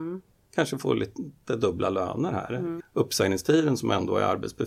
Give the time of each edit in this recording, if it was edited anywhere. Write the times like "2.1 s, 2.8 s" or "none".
2.8 s